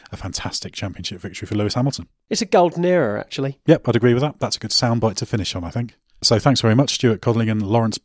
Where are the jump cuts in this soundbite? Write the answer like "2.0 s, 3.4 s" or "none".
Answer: none